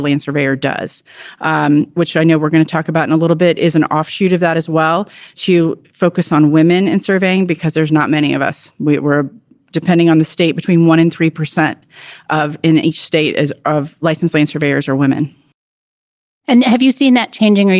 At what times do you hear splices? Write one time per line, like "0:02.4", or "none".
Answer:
0:01.9
0:05.4